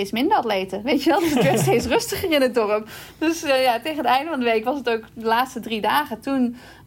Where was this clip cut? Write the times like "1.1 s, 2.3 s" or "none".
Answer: none